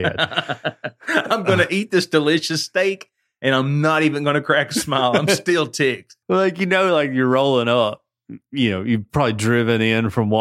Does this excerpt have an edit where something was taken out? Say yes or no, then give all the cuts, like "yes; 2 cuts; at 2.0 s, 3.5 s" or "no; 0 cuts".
yes; 1 cut; at 6.2 s